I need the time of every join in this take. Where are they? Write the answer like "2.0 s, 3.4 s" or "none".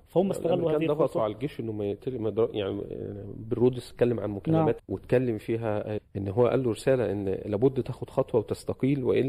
4.8 s, 6.0 s